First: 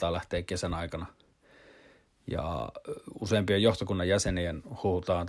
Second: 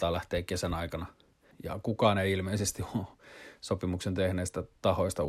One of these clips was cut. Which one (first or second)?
second